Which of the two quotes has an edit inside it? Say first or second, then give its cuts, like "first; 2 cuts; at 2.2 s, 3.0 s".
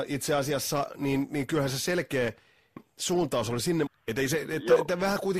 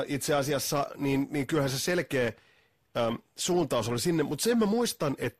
first; 2 cuts; at 2.8 s, 3.9 s